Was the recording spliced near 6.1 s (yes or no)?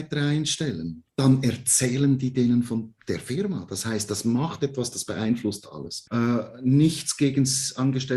yes